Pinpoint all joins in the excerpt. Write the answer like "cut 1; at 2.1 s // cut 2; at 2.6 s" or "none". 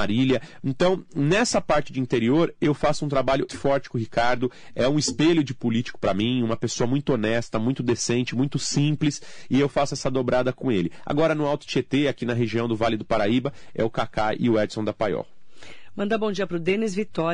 cut 1; at 3.5 s